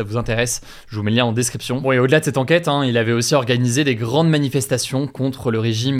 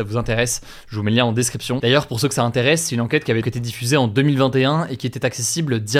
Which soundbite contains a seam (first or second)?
second